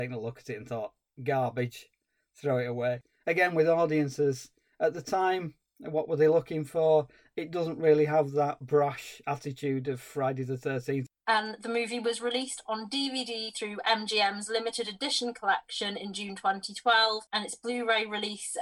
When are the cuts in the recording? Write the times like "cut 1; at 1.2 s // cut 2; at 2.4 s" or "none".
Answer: cut 1; at 11.1 s // cut 2; at 17.3 s

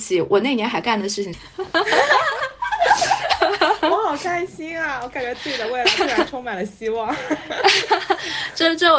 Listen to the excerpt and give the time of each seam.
cut 1; at 1.3 s

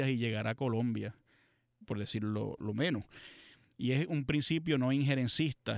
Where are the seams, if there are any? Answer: cut 1; at 1.8 s

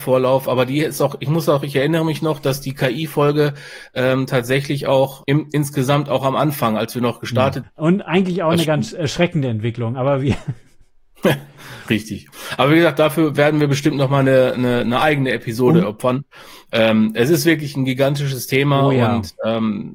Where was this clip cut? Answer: cut 1; at 7.6 s

